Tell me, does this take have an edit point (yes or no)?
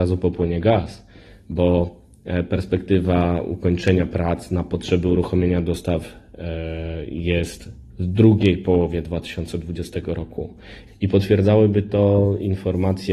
yes